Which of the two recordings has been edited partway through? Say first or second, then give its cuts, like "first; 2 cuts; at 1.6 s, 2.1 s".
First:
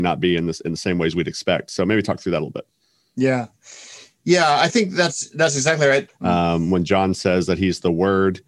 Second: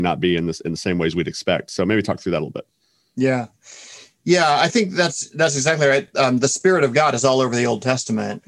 first; 1 cut; at 6.1 s